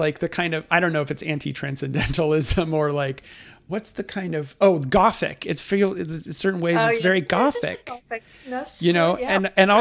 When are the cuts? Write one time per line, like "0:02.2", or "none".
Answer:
none